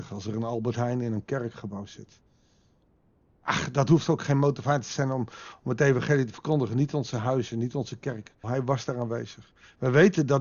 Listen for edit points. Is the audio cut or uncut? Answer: cut